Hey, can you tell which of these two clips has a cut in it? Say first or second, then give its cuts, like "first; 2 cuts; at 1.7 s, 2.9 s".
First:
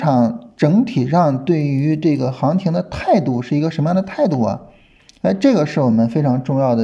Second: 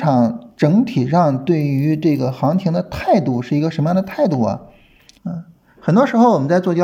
second; 1 cut; at 5.2 s